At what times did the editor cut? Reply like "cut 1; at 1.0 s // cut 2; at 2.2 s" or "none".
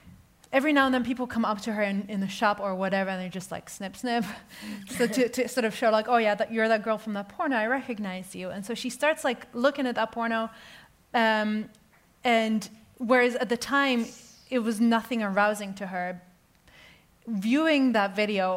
none